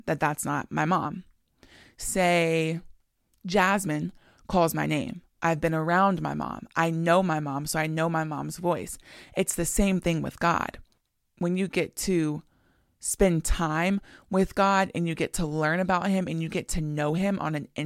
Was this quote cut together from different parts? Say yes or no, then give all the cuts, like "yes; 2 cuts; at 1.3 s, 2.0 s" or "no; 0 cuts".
yes; 1 cut; at 5.4 s